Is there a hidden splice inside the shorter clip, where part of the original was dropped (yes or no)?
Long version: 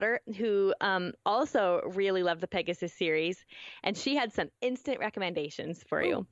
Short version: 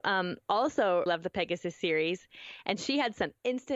yes